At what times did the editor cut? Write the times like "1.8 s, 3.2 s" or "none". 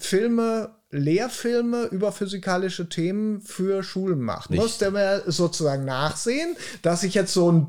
4.5 s